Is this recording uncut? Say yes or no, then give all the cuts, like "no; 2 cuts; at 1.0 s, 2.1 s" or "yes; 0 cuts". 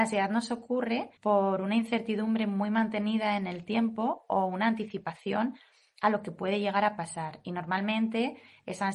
no; 1 cut; at 1.2 s